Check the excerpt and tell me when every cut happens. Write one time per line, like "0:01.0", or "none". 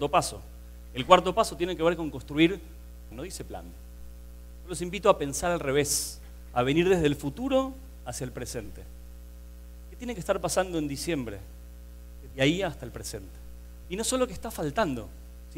0:03.1
0:12.3
0:13.8

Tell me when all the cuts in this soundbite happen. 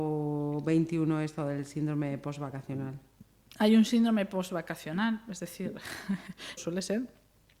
0:06.6

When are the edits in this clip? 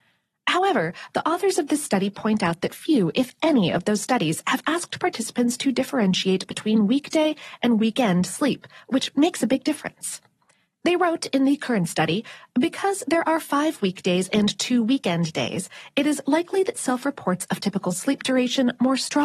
none

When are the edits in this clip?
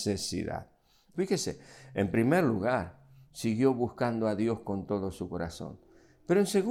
0:01.1

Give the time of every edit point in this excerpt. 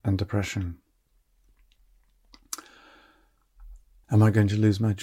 0:04.0

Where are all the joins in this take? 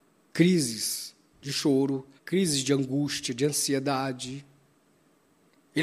0:02.2

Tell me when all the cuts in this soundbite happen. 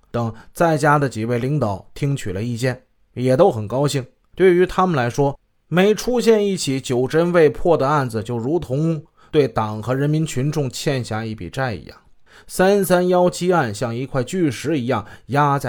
none

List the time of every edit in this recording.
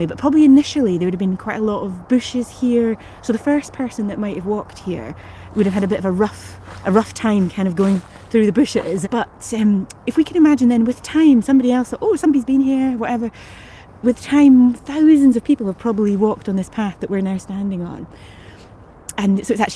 0:09.0

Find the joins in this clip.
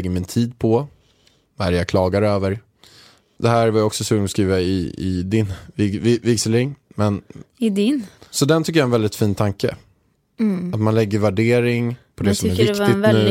0:03.4
0:08.2

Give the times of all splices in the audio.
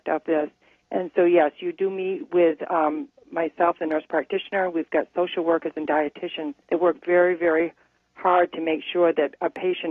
0:04.7
0:06.6

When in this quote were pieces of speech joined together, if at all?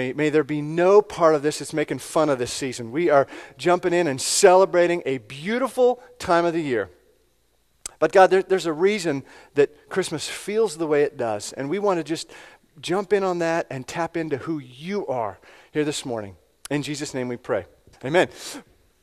0:17.9

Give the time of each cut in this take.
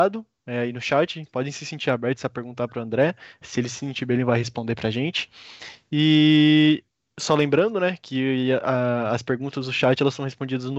none

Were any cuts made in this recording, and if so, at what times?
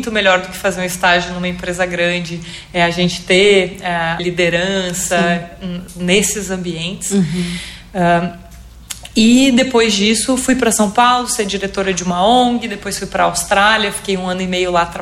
0:04.2

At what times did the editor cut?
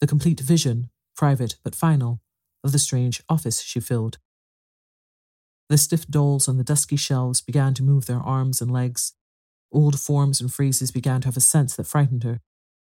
0:05.5

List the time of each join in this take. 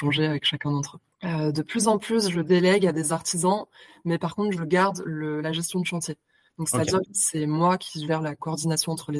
0:01.1
0:07.1

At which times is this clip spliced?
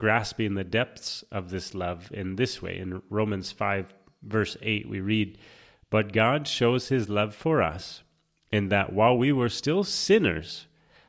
none

